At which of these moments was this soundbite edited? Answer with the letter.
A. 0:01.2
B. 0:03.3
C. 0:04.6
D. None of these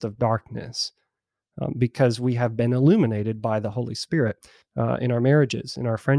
C